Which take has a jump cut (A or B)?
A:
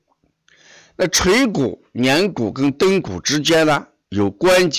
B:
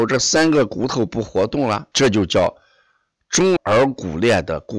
B